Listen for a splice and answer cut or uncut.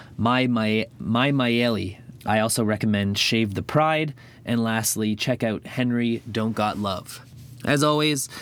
cut